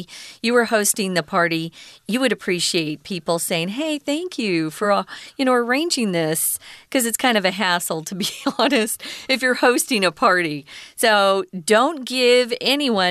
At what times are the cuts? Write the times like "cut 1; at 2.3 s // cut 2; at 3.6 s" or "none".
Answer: none